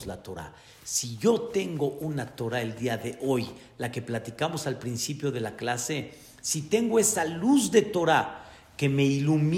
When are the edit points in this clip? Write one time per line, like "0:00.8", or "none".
none